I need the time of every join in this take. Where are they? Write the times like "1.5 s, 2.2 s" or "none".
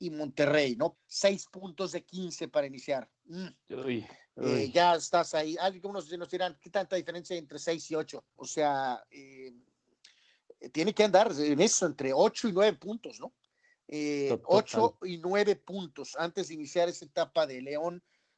0.9 s, 8.4 s